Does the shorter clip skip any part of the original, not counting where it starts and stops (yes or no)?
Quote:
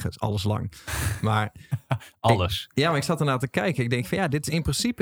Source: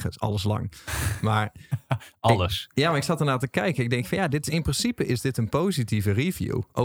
no